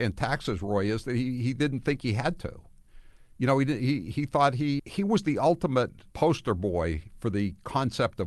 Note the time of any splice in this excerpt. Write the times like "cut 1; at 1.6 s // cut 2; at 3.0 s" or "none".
cut 1; at 4.8 s // cut 2; at 6.1 s